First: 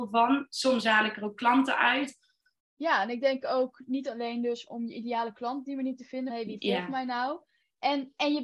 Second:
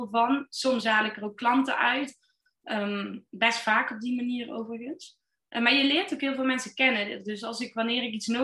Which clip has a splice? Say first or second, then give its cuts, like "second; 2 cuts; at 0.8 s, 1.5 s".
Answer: first; 2 cuts; at 2.6 s, 6.3 s